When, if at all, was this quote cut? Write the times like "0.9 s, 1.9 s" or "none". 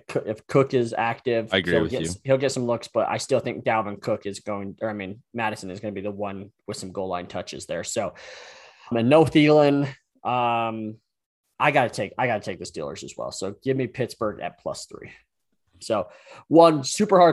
8.9 s, 15.8 s